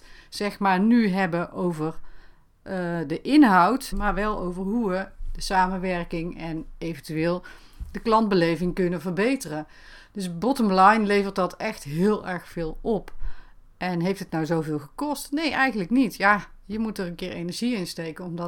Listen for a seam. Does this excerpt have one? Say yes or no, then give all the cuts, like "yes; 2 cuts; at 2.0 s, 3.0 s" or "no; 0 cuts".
yes; 1 cut; at 3.9 s